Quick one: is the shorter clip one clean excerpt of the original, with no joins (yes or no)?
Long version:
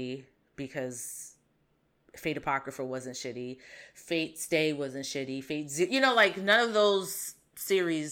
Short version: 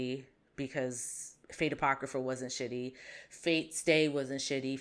no